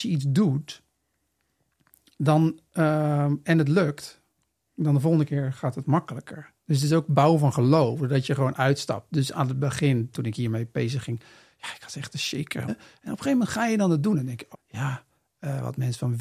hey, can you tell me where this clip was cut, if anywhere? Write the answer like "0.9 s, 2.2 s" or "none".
10.1 s, 12.7 s, 14.5 s